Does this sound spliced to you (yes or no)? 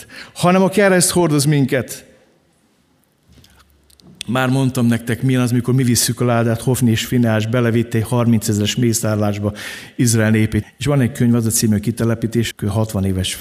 yes